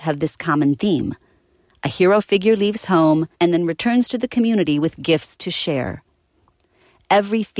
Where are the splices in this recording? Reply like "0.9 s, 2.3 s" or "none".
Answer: 3.3 s

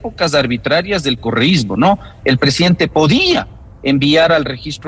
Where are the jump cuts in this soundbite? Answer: 2.2 s

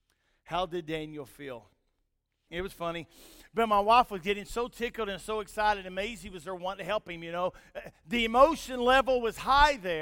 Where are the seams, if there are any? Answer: 2.5 s

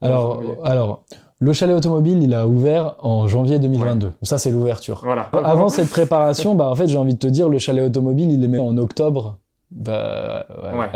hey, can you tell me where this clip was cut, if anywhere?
5.3 s, 8.6 s

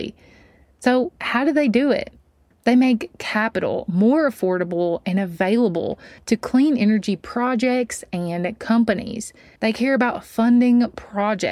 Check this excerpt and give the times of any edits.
2.5 s, 9.6 s

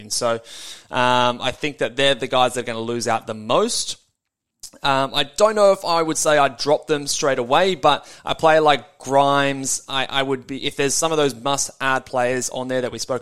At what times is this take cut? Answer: none

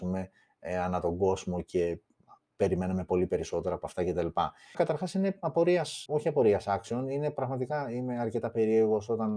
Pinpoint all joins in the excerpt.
4.7 s, 6.1 s

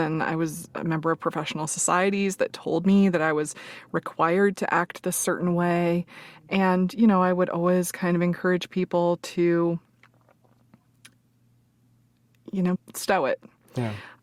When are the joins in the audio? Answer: 12.8 s

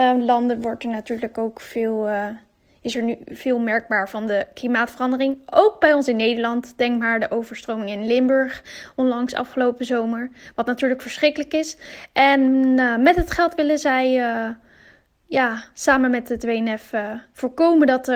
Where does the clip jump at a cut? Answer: none

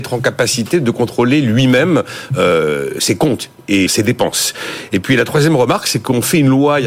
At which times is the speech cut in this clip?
3.9 s

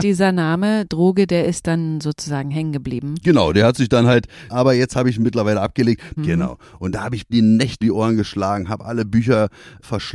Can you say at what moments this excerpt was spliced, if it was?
4.5 s, 6.2 s, 7.8 s

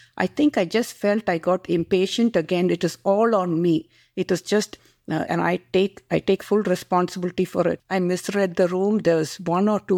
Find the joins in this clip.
5.3 s, 7.8 s

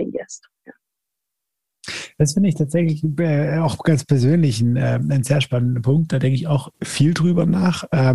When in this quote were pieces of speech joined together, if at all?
6.7 s

